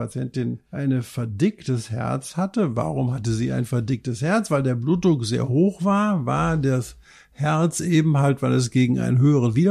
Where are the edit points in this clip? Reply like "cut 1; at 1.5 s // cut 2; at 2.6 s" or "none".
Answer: none